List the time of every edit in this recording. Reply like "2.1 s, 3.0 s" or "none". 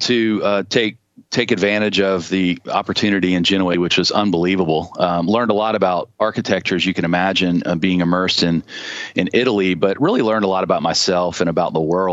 3.7 s

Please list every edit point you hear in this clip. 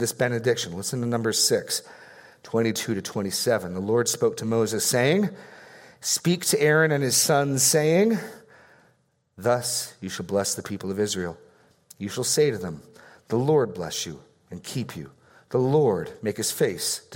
none

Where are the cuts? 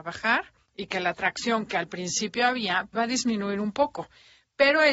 2.9 s

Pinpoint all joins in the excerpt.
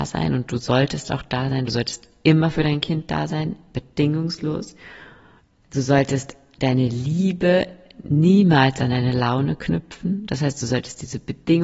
none

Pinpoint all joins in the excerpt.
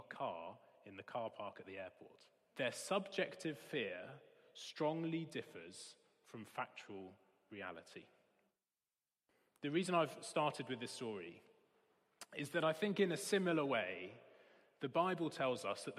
2.5 s

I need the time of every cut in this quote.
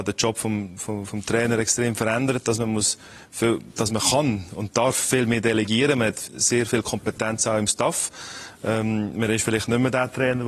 none

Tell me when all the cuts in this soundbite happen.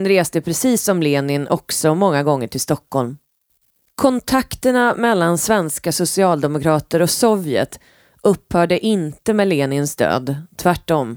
3.9 s

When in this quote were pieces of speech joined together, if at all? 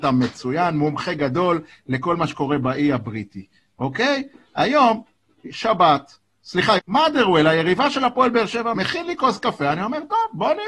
6.8 s, 8.7 s

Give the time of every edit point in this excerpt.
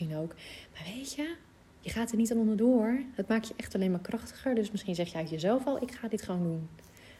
none

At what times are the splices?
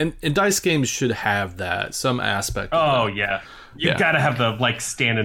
none

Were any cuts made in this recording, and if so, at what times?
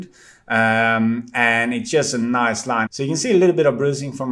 2.9 s

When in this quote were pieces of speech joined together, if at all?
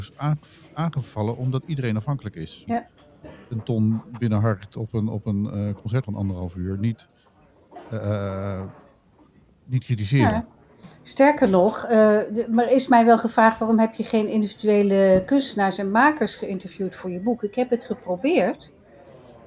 2.7 s, 6.0 s

